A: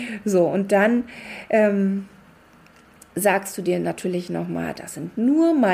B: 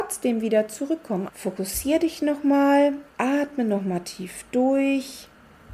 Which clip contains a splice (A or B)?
B